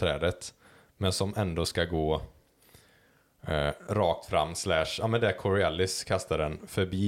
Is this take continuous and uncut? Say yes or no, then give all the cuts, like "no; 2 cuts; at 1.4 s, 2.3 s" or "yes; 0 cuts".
yes; 0 cuts